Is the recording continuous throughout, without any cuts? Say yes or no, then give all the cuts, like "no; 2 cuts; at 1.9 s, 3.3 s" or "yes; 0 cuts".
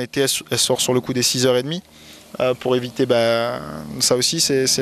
yes; 0 cuts